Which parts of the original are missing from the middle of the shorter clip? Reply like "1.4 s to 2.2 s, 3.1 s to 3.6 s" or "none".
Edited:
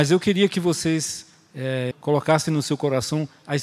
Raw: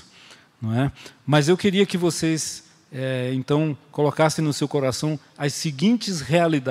3.3 s to 3.8 s